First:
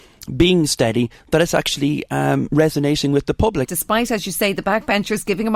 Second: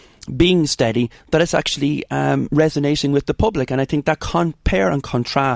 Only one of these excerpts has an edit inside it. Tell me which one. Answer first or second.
first